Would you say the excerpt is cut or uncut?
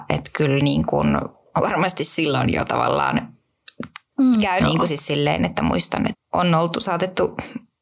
cut